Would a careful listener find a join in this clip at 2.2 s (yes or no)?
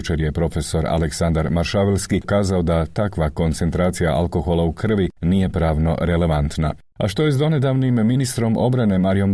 yes